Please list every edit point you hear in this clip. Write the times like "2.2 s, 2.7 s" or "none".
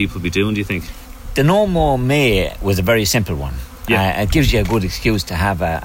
none